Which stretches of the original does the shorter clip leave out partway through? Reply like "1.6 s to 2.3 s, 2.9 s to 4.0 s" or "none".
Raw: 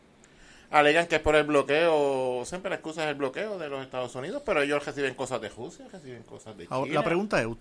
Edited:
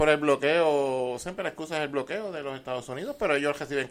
none